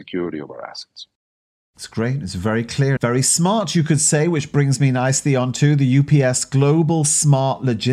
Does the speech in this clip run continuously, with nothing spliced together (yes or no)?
no